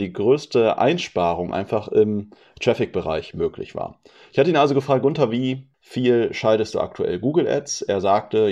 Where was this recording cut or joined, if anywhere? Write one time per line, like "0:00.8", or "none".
0:05.7